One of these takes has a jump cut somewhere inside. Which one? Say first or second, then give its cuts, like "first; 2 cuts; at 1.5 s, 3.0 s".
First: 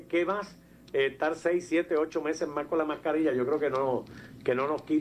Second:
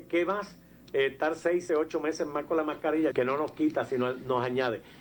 second; 2 cuts; at 1.7 s, 3.1 s